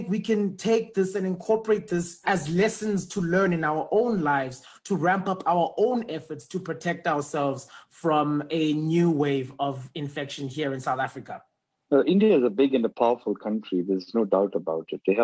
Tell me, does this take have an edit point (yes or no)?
no